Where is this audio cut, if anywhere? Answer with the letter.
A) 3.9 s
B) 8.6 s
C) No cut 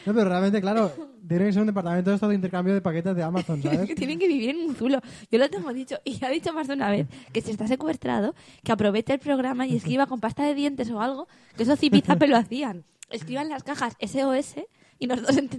C